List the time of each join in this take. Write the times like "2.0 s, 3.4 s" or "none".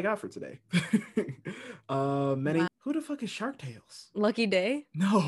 2.7 s